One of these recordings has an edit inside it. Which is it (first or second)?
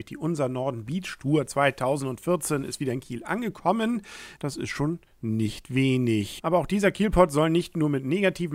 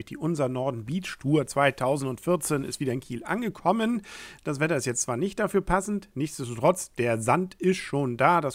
first